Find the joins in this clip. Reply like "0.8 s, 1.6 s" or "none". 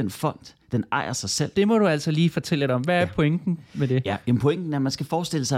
1.5 s